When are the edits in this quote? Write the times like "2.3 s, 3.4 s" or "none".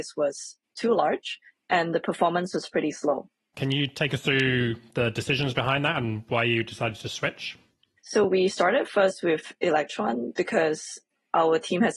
3.5 s, 8.0 s